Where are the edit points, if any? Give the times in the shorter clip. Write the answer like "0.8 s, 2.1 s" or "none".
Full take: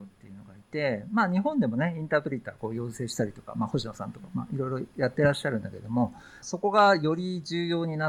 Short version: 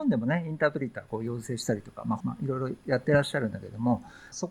2.2 s